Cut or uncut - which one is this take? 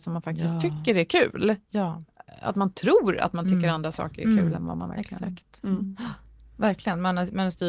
uncut